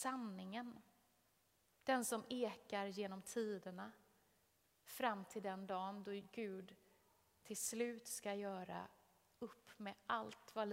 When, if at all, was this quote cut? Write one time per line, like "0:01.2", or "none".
0:01.7